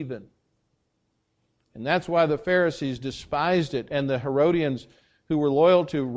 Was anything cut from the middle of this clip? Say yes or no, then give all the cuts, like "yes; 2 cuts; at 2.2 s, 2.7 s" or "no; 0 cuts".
no; 0 cuts